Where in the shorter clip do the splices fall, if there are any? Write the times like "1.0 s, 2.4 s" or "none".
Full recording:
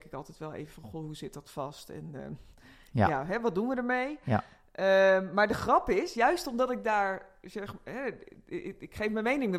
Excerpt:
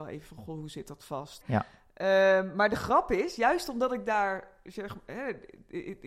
1.4 s